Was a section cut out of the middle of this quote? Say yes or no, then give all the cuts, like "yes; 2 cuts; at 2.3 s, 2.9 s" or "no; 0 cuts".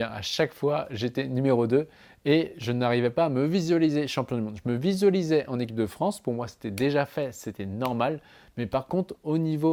no; 0 cuts